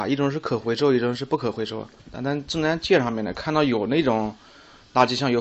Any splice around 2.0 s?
yes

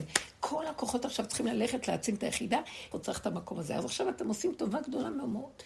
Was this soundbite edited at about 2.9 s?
yes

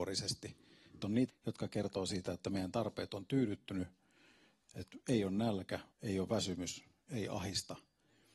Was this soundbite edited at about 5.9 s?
yes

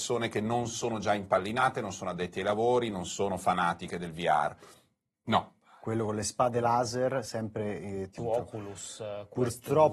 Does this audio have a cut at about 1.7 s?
no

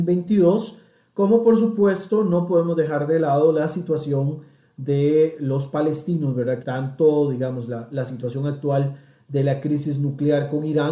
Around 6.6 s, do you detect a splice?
yes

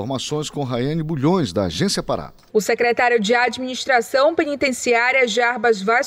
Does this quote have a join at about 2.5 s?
yes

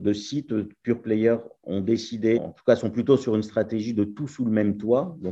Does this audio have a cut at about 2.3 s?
yes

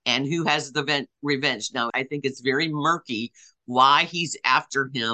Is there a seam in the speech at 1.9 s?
yes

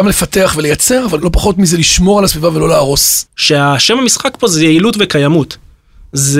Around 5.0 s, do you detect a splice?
no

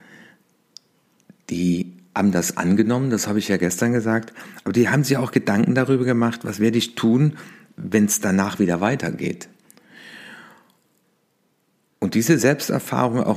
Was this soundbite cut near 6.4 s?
no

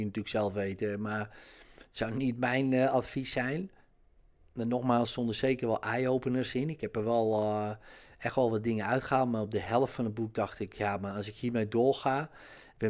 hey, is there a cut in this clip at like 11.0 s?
no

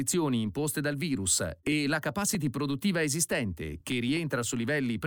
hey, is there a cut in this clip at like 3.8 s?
no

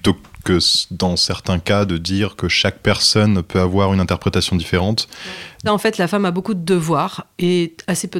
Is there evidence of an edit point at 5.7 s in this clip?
yes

